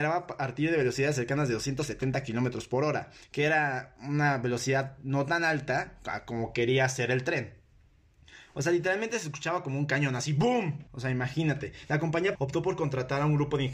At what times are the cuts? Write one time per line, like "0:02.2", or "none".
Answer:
0:10.9
0:12.4